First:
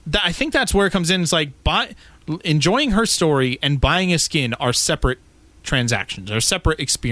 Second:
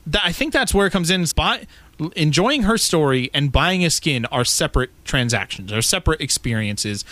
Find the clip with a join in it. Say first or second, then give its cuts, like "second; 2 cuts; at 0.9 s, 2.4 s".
second; 2 cuts; at 1.3 s, 5.0 s